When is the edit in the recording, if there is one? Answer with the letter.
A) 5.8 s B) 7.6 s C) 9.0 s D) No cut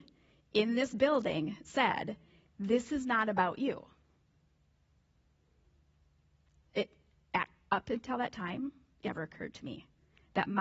C